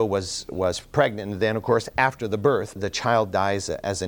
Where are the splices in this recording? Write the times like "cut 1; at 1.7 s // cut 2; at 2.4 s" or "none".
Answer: cut 1; at 2.8 s